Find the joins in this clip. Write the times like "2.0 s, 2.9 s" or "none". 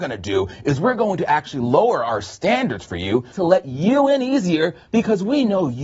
3.3 s